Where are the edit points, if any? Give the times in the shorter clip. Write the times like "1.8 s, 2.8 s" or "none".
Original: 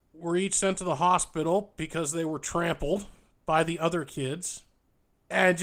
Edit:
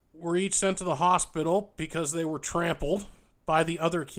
none